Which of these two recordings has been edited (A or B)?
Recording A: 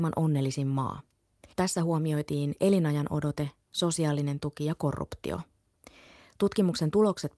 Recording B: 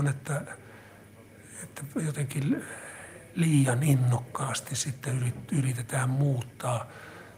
A